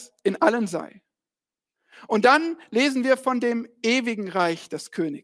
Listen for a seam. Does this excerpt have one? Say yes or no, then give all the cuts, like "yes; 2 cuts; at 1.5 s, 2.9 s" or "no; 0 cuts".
no; 0 cuts